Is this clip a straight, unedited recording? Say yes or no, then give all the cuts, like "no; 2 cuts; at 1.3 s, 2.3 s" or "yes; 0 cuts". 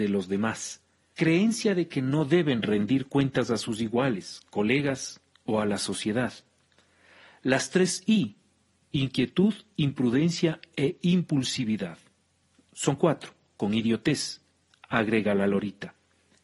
no; 1 cut; at 1.1 s